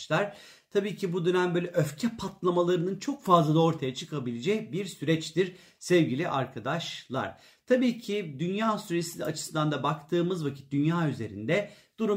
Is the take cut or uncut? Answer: uncut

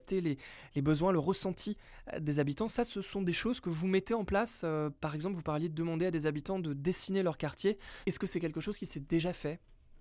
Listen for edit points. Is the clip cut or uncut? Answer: uncut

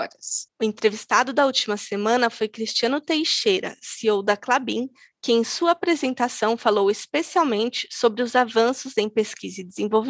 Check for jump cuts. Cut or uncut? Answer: uncut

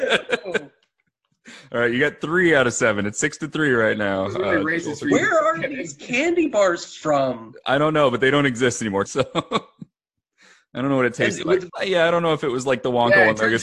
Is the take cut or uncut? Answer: cut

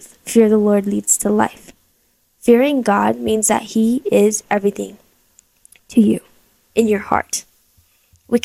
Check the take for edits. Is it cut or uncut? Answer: uncut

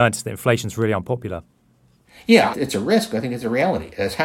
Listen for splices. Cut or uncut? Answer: cut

